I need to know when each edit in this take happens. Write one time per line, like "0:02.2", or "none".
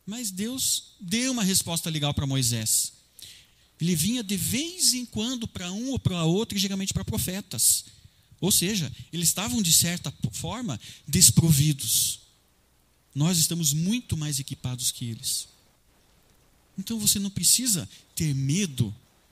0:03.6